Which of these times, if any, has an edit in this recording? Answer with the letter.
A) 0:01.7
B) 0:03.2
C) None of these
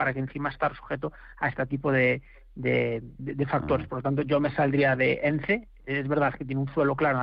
B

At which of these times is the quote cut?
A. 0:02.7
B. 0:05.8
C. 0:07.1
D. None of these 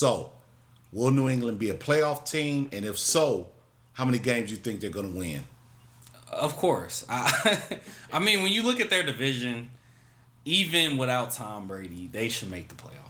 D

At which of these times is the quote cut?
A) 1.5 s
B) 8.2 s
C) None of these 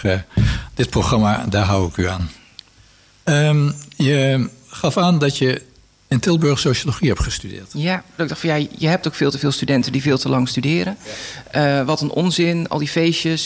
B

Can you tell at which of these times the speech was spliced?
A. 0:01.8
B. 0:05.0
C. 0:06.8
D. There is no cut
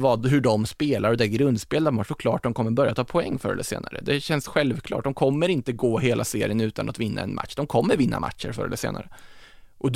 D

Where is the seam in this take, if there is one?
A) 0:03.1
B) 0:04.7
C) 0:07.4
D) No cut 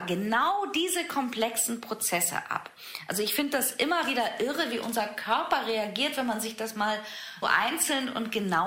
C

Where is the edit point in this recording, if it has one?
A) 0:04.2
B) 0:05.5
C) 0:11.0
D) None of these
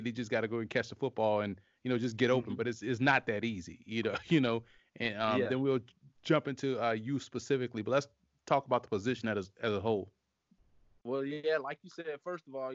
D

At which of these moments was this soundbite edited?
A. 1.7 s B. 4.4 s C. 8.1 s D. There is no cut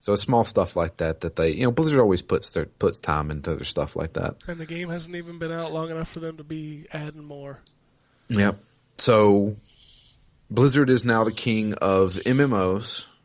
B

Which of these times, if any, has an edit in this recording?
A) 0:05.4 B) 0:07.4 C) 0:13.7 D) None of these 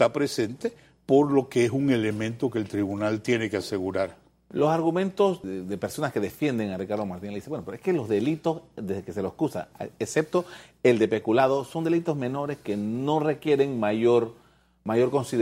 A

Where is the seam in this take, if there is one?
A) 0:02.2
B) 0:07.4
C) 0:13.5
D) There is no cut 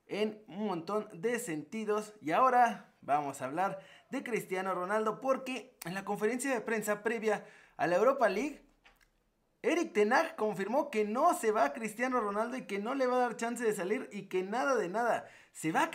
D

